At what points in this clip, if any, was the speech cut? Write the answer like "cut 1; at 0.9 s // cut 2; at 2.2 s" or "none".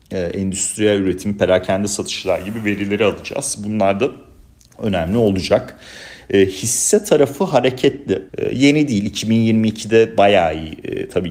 cut 1; at 8.3 s

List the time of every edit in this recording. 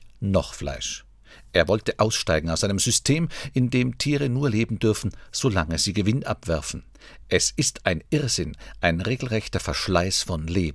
none

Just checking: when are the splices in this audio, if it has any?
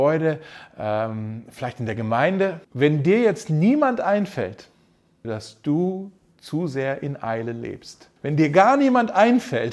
cut 1; at 2.6 s // cut 2; at 5.2 s // cut 3; at 8.2 s

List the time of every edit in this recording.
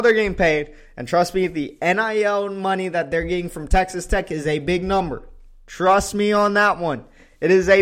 none

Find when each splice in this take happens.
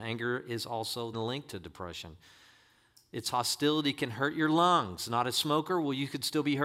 cut 1; at 1.1 s

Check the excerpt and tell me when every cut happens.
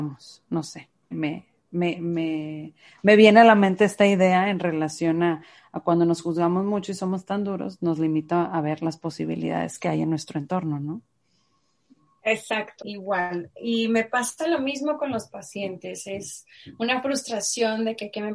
cut 1; at 1.1 s // cut 2; at 12.8 s

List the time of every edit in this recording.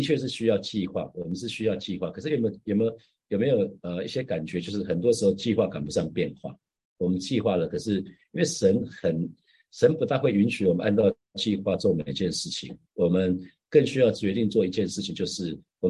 cut 1; at 11.2 s

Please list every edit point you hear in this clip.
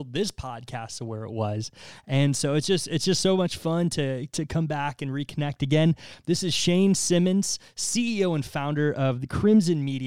none

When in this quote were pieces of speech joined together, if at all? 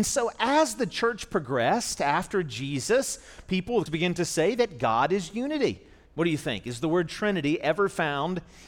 cut 1; at 3.9 s // cut 2; at 6.1 s

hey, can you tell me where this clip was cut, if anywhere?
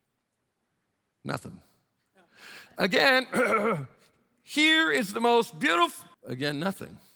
cut 1; at 6.1 s

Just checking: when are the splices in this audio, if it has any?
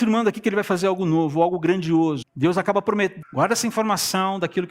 cut 1; at 2.2 s // cut 2; at 3.2 s

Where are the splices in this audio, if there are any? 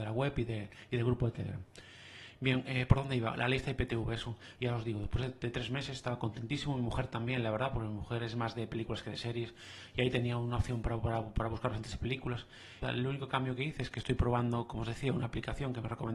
cut 1; at 4.6 s // cut 2; at 12.8 s

